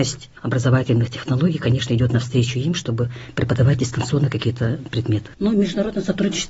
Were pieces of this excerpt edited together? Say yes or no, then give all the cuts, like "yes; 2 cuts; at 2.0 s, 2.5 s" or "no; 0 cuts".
yes; 1 cut; at 5.3 s